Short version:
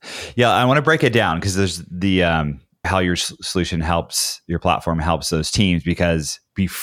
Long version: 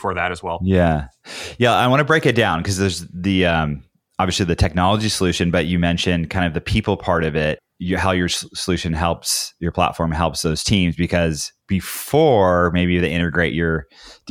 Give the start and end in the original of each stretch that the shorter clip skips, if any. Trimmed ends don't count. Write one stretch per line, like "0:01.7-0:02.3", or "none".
0:04.1-0:08.0